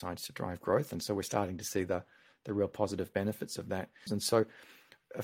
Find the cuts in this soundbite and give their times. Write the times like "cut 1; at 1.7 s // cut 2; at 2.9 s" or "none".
cut 1; at 4.1 s